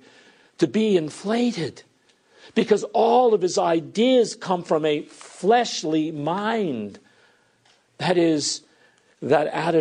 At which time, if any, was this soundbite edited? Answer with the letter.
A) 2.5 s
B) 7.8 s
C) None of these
C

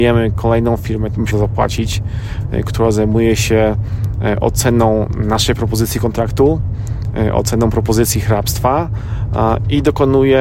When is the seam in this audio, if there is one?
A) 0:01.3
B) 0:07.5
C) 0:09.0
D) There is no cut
A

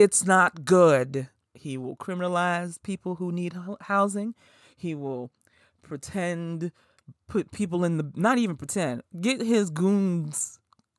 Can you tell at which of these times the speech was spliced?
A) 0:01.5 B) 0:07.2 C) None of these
A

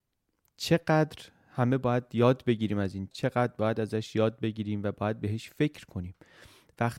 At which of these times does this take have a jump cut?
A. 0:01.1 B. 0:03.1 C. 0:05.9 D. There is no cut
B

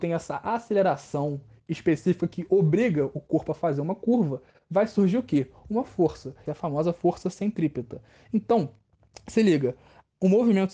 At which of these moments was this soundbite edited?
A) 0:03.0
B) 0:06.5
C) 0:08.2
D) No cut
B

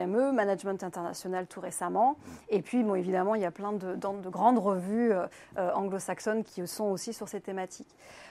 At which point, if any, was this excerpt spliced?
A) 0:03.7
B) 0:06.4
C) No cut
B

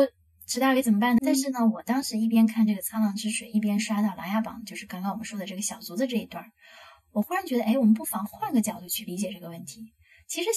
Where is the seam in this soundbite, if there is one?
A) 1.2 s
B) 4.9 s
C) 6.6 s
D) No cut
A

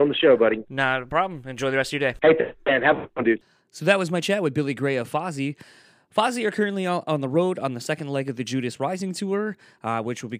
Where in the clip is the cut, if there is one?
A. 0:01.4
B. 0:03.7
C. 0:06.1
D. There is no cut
D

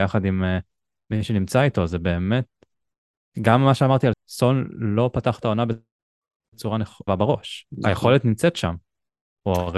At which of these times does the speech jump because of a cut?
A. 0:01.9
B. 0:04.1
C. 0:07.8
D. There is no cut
B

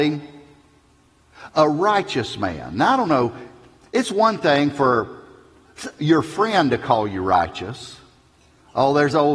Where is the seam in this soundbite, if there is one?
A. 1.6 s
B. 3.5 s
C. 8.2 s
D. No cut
D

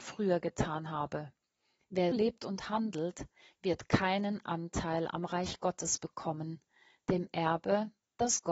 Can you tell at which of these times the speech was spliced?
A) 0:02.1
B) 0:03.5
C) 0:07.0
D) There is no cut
A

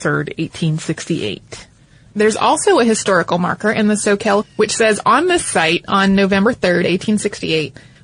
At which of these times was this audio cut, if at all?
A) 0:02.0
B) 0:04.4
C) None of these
B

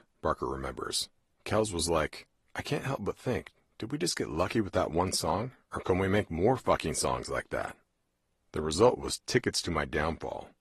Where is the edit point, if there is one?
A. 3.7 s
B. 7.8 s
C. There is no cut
C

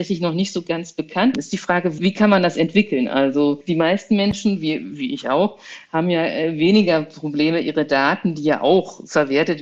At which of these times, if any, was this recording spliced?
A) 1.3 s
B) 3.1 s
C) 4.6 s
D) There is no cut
A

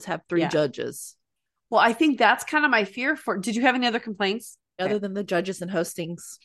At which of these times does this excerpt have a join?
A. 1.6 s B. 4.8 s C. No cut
B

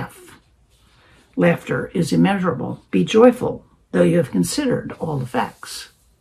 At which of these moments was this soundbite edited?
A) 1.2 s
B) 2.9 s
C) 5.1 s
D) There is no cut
B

